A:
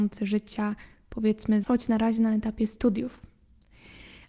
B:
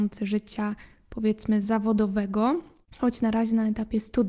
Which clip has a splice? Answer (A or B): A